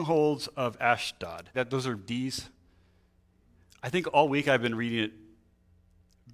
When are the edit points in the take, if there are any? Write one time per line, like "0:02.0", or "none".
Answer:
0:01.5